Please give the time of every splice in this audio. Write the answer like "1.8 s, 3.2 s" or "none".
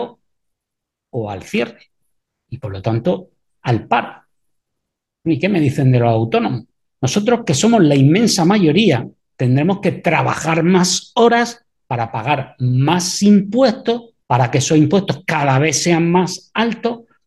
6.8 s, 14.2 s

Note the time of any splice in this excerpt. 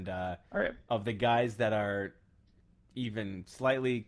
none

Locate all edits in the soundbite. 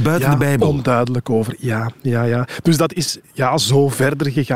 none

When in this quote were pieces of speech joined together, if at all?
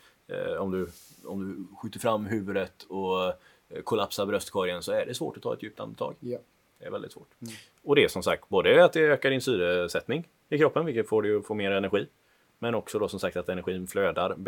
7.3 s

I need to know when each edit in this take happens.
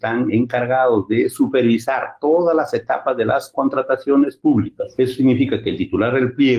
none

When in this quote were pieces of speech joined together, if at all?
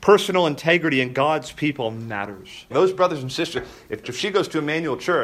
2.7 s, 4.0 s

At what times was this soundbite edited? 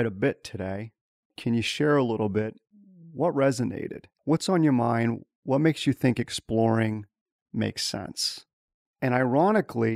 none

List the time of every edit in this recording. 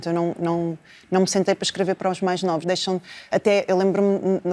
2.6 s

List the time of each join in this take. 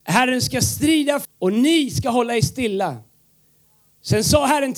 1.2 s

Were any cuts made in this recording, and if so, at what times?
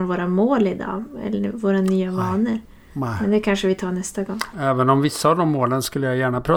4.5 s

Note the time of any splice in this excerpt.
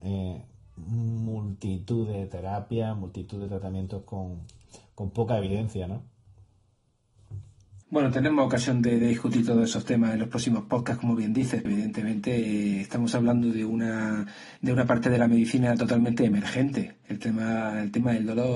7.8 s, 11.7 s, 14.6 s

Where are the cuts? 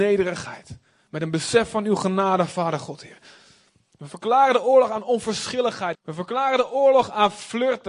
5.9 s

